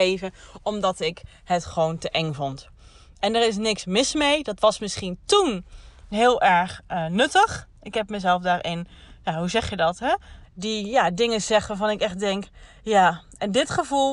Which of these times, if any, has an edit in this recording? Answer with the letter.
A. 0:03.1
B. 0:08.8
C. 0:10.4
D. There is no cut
C